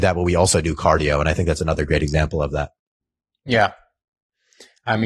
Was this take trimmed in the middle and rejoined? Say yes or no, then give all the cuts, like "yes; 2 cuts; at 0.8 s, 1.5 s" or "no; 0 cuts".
no; 0 cuts